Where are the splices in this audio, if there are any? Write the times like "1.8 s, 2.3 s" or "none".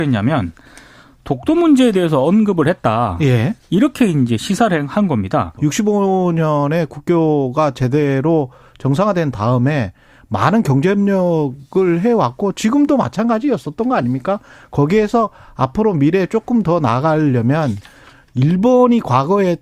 5.6 s